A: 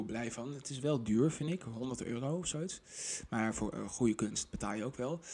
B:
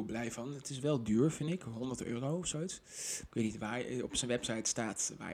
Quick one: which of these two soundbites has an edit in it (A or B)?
B